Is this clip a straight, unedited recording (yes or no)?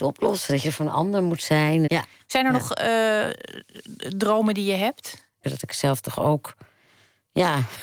no